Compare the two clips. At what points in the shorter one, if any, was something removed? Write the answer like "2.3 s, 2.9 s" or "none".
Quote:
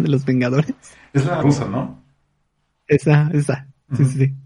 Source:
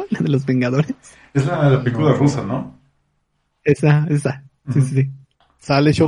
1.4 s